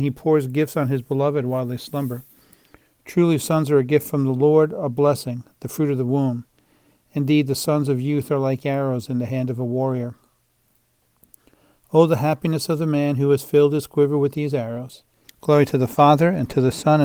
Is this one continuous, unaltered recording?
no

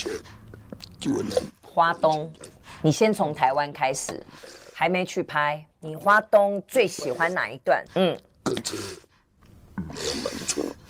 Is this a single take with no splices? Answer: no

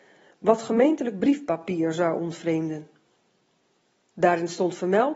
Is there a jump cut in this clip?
yes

